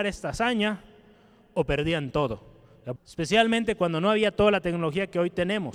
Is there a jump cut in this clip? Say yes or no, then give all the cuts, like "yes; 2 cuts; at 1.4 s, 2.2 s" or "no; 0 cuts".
yes; 1 cut; at 3.0 s